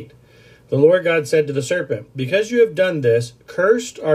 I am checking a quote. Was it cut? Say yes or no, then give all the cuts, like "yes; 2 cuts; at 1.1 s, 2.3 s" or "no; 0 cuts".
no; 0 cuts